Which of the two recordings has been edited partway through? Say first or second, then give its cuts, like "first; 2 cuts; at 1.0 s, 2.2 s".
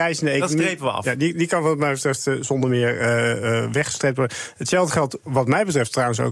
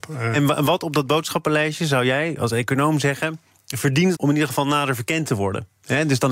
second; 1 cut; at 4.2 s